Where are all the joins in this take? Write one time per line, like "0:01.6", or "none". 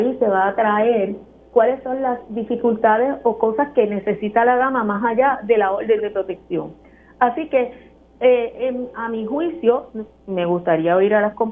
none